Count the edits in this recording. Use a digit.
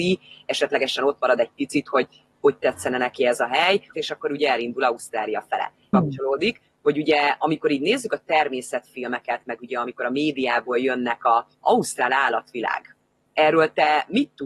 3